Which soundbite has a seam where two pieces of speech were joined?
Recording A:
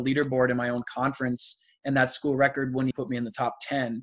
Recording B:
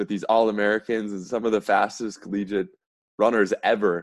A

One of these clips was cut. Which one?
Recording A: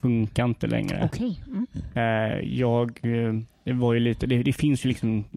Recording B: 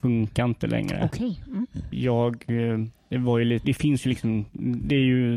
B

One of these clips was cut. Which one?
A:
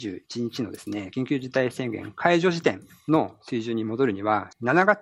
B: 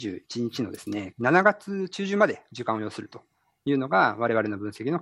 B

